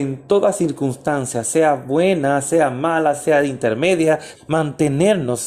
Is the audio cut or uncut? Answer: cut